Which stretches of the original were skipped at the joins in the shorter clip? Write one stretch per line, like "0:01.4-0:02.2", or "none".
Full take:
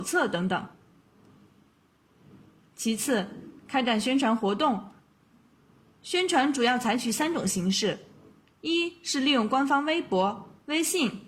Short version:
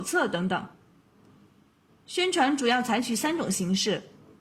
0:01.9-0:05.8